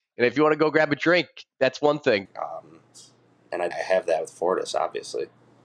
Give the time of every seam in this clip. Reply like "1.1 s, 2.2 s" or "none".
2.2 s, 3.7 s